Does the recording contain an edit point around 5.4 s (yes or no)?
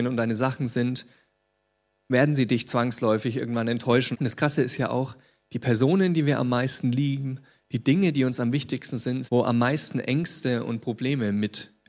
no